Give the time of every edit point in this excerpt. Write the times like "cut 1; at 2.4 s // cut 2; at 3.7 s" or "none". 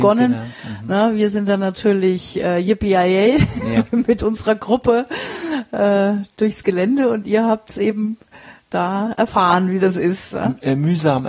none